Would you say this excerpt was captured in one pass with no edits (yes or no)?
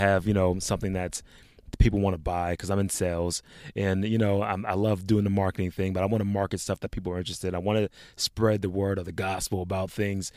yes